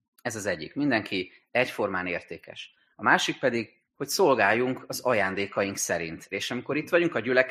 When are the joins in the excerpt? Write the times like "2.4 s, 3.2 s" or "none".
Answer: 3.8 s, 6.3 s